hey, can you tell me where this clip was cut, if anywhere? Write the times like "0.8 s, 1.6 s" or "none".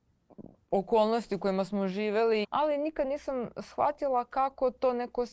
2.4 s